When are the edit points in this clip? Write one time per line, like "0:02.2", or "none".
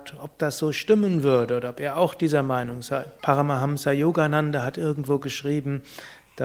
0:03.2